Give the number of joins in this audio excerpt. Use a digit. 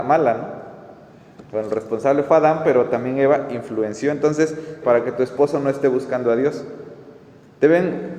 2